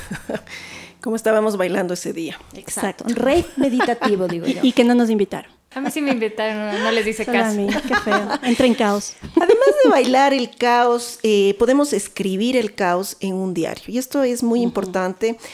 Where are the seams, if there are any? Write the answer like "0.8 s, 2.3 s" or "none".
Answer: 5.7 s